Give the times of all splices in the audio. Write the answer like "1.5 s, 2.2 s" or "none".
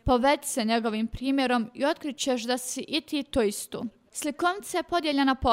4.1 s